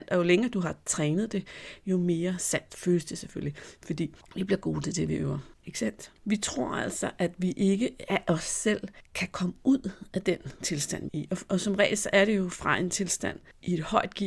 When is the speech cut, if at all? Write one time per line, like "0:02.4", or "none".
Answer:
0:11.1